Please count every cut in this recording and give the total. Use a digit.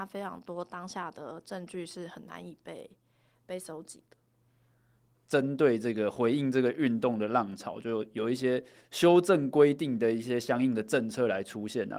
2